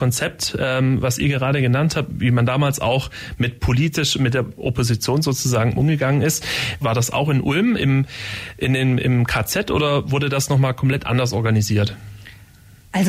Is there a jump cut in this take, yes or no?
yes